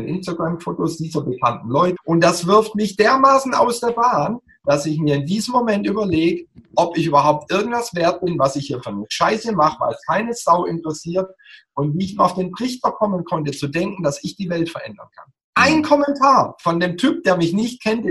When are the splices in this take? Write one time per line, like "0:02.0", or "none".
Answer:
0:02.0